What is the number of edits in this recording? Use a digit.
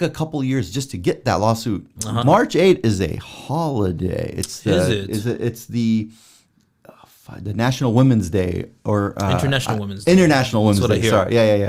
1